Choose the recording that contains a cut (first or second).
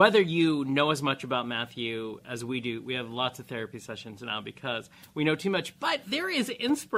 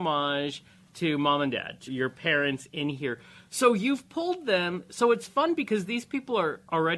second